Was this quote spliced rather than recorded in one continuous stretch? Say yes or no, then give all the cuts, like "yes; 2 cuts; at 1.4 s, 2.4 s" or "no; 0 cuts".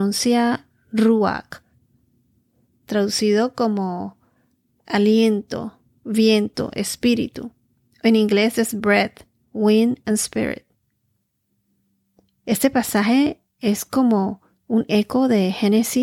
no; 0 cuts